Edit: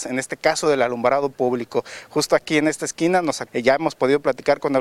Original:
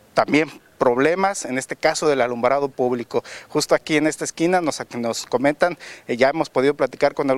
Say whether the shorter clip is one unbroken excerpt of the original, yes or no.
no